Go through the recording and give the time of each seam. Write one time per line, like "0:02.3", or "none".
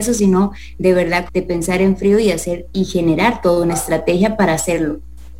0:01.3